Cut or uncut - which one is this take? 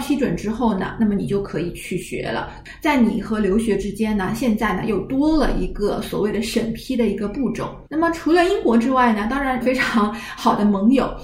cut